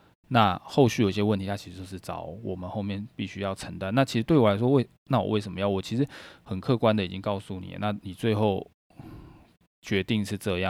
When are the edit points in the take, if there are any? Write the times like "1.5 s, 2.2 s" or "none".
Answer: none